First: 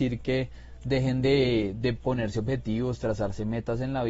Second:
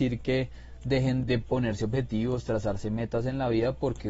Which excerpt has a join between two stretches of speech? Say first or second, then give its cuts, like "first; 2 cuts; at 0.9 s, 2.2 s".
second; 1 cut; at 1.2 s